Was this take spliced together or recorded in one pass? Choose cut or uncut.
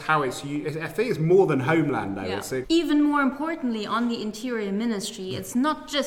cut